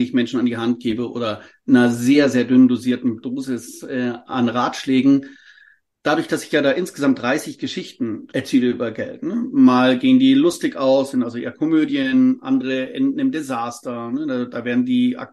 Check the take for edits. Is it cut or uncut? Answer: uncut